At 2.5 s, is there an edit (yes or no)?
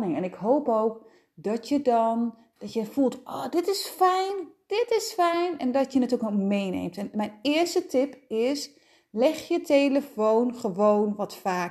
no